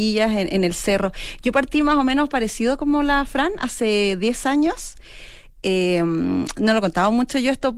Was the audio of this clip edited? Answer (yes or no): no